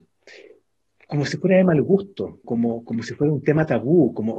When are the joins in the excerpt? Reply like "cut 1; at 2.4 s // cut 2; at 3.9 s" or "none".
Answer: cut 1; at 2.4 s